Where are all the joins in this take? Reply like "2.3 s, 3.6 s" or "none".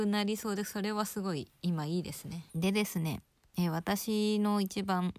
2.5 s